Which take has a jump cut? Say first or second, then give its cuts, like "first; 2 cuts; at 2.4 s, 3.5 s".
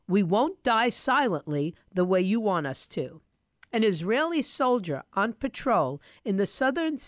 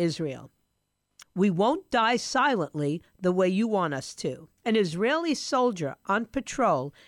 second; 2 cuts; at 1.2 s, 4.6 s